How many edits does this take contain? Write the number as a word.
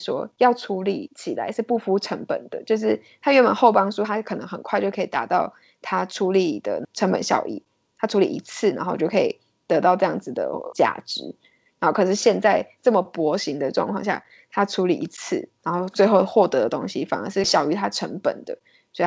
zero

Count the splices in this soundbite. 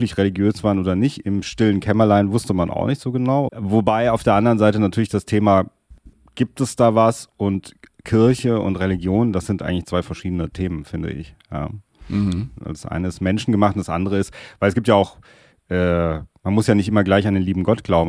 one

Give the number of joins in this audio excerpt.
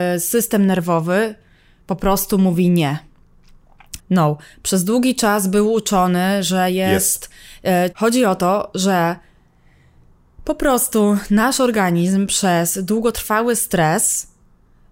two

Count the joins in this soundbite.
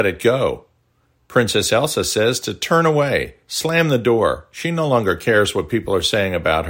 zero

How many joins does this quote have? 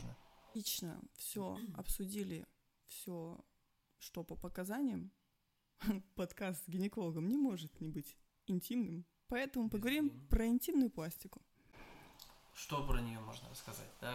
zero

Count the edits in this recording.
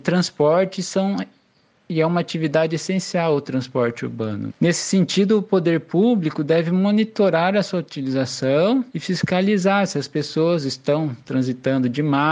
two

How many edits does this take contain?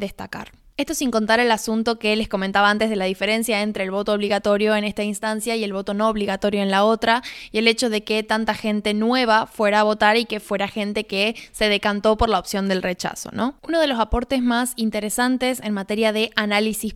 one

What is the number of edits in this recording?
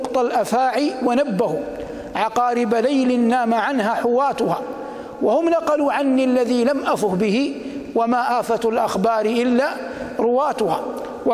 zero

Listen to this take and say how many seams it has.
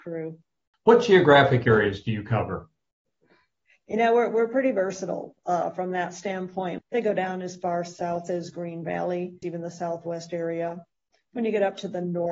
two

